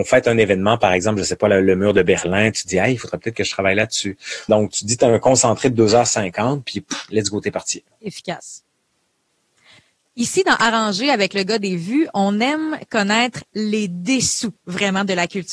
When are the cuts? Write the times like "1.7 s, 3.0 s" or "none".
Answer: 4.5 s